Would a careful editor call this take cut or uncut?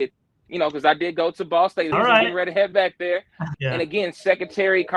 cut